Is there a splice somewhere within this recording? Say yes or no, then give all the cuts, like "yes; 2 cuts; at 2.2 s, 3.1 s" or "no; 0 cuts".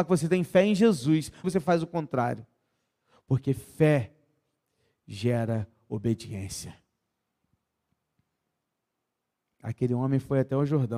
yes; 1 cut; at 1.4 s